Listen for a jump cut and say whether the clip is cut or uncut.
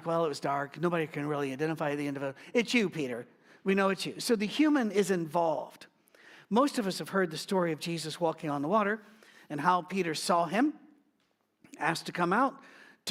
uncut